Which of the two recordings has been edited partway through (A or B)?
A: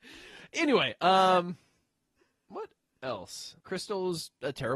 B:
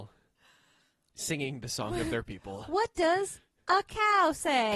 A